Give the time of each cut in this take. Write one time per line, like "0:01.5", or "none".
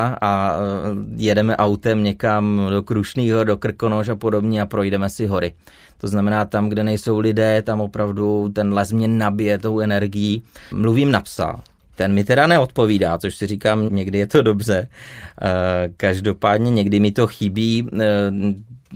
0:10.7
0:13.9